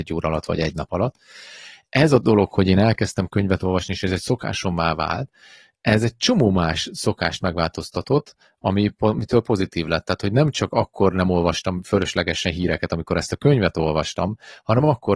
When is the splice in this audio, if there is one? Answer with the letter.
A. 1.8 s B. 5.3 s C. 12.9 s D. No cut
D